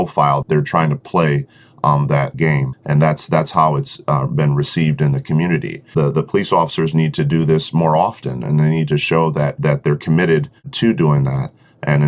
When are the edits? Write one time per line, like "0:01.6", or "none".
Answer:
none